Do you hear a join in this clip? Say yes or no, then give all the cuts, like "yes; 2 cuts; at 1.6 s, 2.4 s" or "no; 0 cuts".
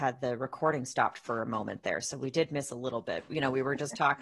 yes; 1 cut; at 3.3 s